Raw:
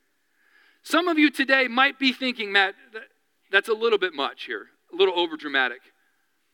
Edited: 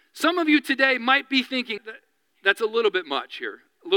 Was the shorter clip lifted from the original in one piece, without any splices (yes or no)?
no